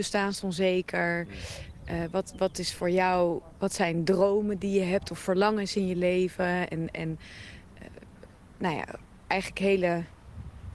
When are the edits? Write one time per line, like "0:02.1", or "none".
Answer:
none